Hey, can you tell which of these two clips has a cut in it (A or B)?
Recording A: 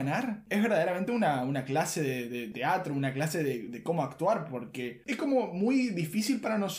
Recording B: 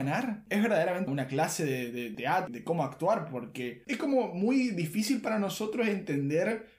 B